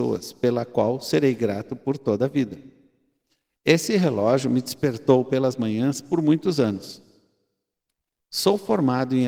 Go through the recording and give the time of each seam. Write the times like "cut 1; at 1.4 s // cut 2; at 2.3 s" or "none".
none